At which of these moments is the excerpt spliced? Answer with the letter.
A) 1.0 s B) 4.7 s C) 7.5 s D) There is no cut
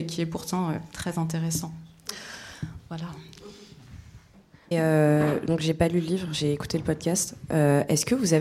B